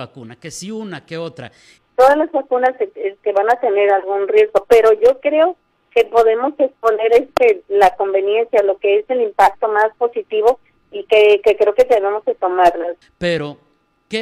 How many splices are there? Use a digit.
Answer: 2